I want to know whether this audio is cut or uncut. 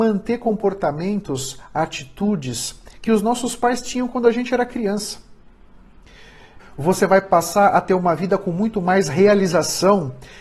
cut